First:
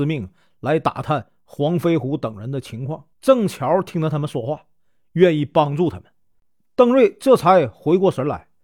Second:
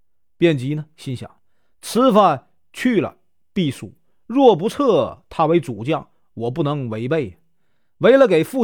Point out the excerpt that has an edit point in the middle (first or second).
first